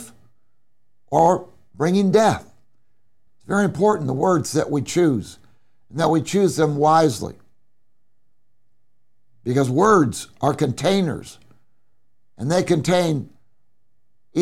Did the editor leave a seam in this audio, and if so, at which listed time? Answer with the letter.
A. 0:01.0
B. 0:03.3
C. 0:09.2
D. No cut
B